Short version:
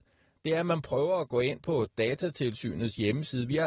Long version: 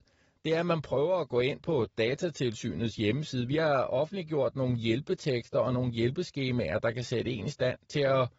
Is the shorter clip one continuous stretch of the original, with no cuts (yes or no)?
yes